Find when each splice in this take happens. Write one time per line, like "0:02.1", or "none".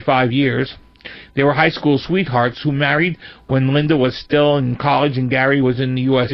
none